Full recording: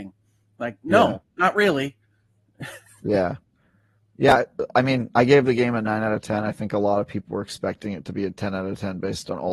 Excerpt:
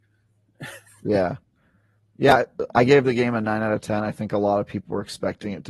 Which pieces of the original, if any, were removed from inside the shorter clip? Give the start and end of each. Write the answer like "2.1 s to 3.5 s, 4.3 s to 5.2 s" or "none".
4.7 s to 5.1 s